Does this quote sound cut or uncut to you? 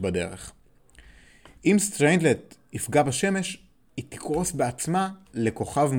uncut